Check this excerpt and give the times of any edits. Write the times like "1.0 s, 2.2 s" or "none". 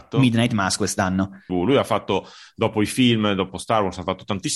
1.5 s